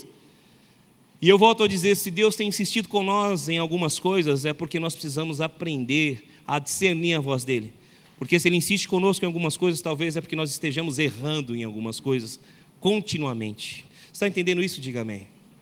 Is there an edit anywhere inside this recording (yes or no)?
no